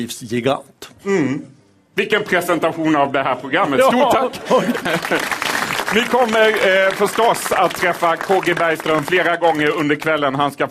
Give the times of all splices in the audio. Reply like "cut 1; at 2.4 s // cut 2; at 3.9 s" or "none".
cut 1; at 4.7 s